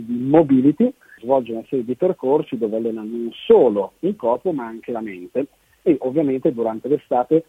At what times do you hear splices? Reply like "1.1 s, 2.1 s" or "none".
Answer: 1.2 s